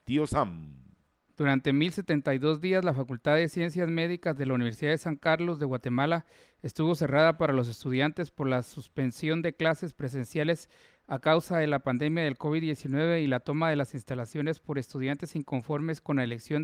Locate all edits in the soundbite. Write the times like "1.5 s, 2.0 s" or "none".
1.3 s